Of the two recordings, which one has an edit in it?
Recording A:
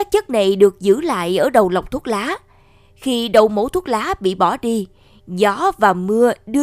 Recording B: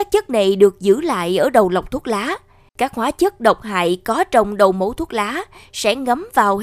B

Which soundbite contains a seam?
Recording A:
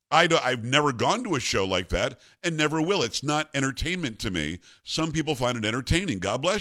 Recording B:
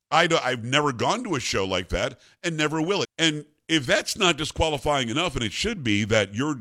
B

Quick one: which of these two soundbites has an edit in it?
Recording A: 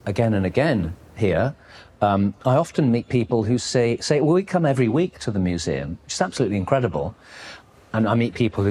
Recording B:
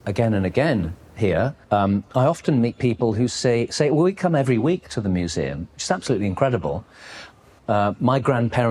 B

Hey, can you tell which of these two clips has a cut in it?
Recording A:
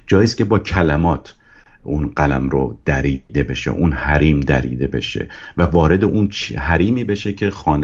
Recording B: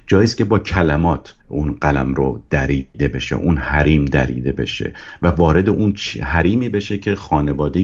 B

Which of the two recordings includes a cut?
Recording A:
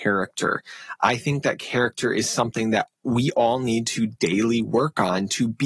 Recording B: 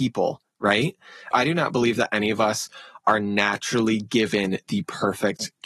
B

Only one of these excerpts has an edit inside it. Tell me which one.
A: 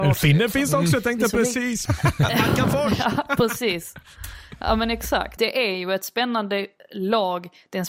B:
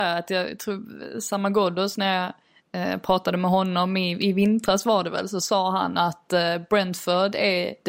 A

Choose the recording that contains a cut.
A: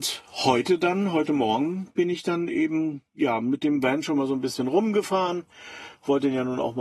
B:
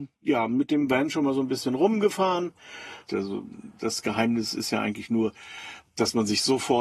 B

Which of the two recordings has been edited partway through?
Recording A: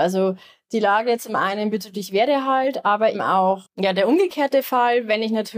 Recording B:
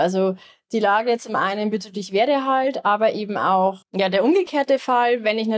A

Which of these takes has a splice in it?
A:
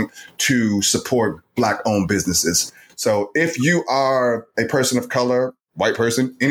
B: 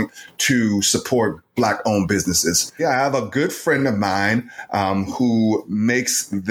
B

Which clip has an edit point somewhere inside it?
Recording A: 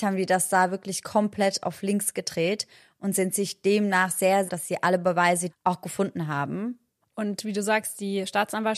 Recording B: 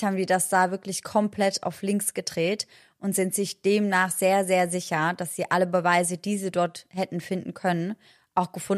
A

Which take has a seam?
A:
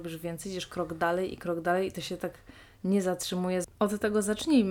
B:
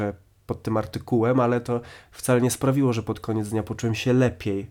A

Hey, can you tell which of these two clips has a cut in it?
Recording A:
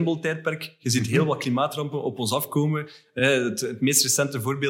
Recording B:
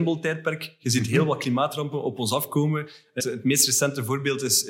B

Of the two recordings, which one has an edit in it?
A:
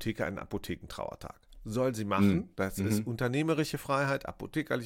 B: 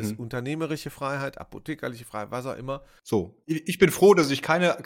B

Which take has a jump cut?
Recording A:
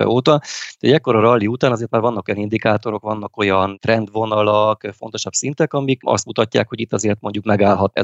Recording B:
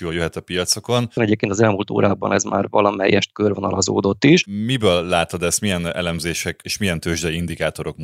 B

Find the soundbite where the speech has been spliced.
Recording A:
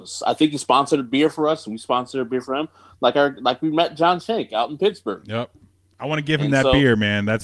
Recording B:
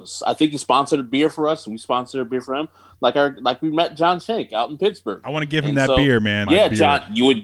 B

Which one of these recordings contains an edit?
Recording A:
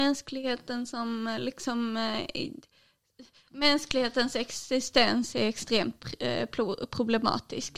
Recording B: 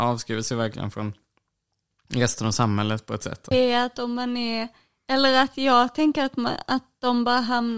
B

